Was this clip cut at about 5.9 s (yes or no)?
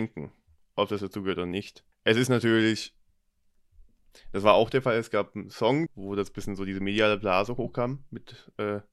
yes